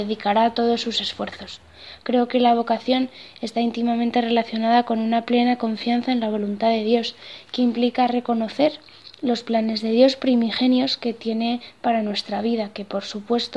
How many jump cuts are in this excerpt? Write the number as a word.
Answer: one